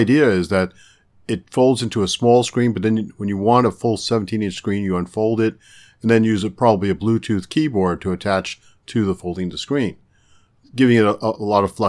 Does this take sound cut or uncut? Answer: uncut